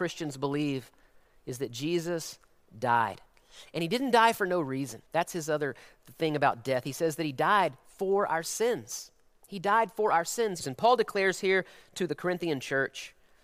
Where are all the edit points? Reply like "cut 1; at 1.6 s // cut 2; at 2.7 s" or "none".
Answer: cut 1; at 5.1 s // cut 2; at 10.6 s